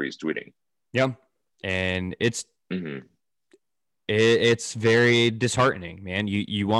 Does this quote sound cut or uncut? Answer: cut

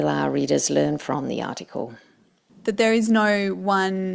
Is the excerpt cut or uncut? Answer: cut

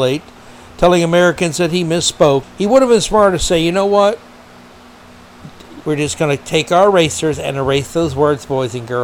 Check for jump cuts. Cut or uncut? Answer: cut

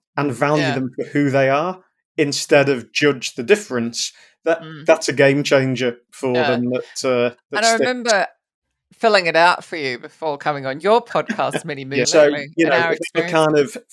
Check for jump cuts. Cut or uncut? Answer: cut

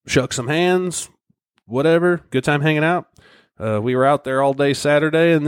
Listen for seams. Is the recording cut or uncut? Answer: cut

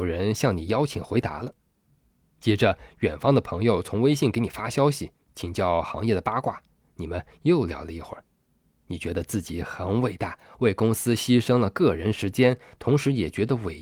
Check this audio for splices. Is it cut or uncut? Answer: cut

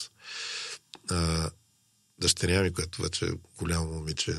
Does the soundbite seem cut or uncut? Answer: uncut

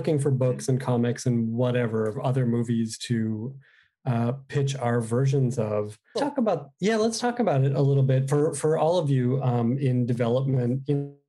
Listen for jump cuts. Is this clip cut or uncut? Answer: cut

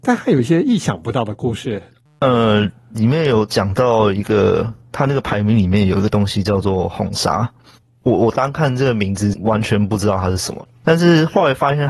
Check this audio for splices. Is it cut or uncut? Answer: uncut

